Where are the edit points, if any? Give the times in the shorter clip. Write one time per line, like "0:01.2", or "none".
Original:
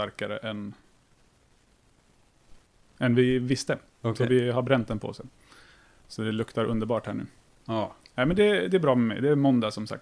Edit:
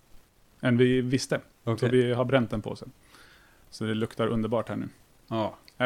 none